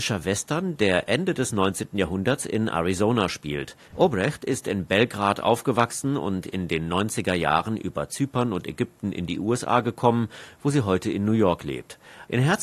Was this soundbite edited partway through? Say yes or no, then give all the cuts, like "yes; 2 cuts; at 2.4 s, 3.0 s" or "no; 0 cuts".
no; 0 cuts